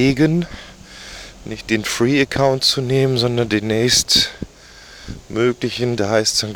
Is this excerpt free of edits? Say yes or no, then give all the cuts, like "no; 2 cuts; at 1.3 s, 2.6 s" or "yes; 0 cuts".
yes; 0 cuts